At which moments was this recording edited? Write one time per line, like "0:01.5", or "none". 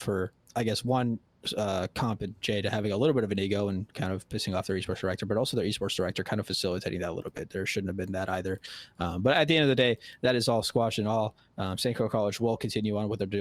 none